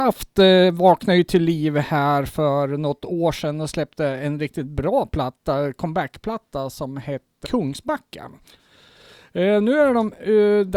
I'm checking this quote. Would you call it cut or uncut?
cut